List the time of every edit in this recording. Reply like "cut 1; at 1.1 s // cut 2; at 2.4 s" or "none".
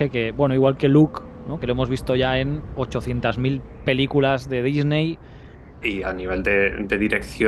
cut 1; at 1.6 s // cut 2; at 5.8 s